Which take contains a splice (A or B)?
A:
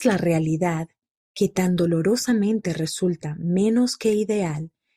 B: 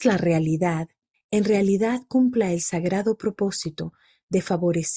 B